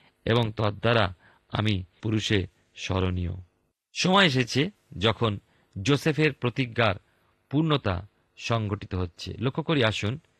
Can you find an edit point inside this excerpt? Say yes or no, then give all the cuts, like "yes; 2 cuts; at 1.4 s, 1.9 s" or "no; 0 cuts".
yes; 1 cut; at 2.0 s